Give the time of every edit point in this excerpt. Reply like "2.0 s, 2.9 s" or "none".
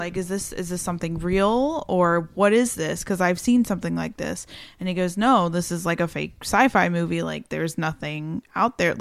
none